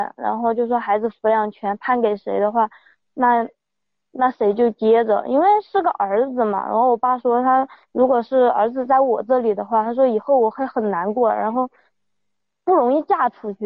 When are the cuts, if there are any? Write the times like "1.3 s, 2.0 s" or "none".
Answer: none